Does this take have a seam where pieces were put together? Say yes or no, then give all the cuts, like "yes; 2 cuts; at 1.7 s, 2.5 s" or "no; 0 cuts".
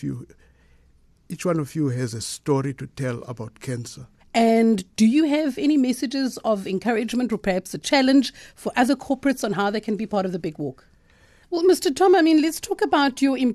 yes; 2 cuts; at 4.2 s, 11.4 s